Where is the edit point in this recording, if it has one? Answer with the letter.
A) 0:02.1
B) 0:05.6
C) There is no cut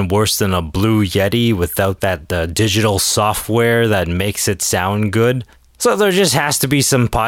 B